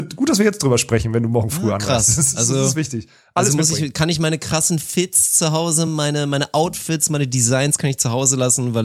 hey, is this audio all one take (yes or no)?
yes